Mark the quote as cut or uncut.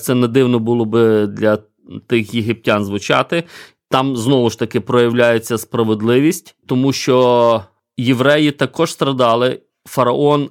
uncut